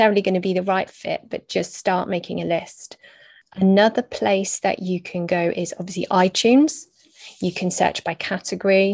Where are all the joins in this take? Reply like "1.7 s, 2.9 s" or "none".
none